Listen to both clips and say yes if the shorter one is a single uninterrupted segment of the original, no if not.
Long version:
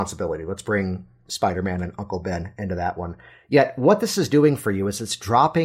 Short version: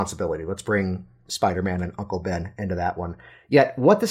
yes